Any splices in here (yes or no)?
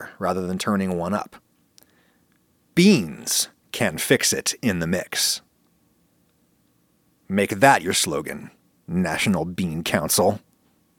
no